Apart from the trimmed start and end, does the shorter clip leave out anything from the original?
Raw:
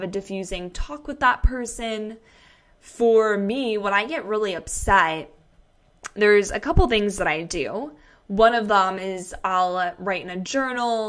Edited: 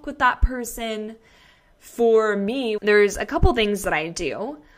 yes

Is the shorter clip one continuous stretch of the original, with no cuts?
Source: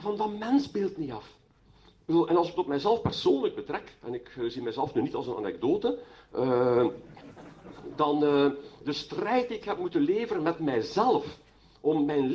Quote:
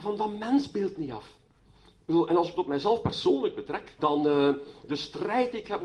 no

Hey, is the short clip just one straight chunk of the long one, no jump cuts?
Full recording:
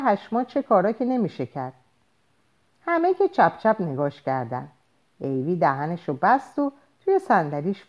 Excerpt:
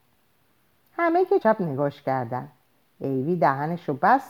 no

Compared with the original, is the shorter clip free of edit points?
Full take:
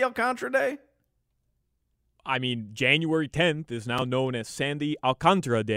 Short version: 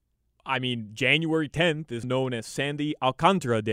no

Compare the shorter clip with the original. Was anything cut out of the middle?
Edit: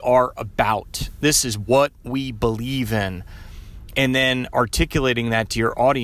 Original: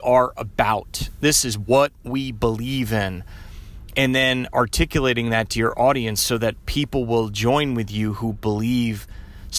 no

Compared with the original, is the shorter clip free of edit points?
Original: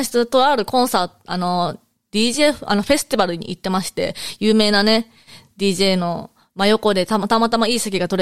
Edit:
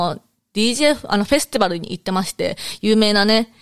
yes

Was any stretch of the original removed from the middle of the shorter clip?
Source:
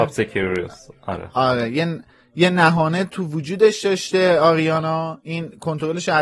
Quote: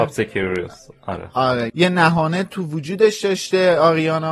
yes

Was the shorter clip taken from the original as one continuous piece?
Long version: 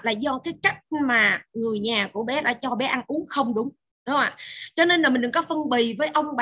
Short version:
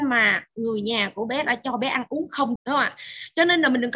no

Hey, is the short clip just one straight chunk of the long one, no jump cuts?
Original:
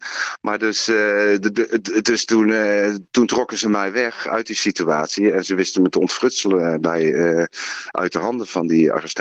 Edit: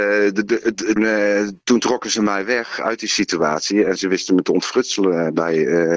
no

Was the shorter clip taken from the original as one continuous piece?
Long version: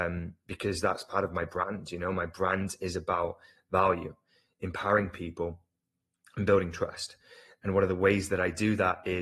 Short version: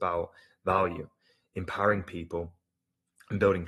yes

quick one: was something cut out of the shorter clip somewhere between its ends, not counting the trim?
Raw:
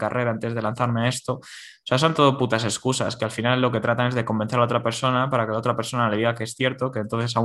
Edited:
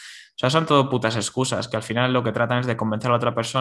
no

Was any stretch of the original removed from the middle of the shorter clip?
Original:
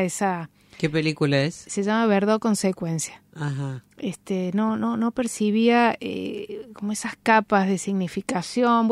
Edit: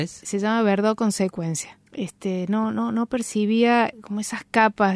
yes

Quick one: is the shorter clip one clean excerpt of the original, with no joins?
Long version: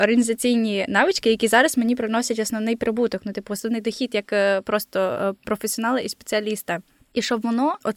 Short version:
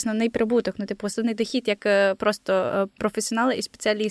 yes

